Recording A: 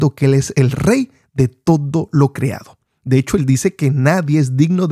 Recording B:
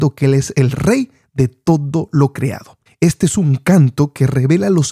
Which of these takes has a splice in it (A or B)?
B